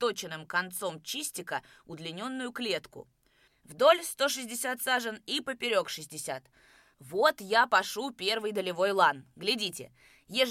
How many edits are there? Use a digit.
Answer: 1